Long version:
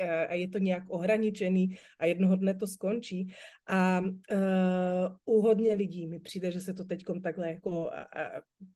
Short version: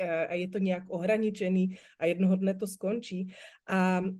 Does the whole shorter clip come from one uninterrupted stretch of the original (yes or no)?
yes